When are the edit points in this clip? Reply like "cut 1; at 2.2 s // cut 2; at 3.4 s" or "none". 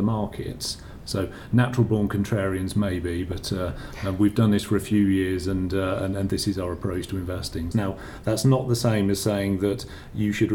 cut 1; at 1.0 s // cut 2; at 7.7 s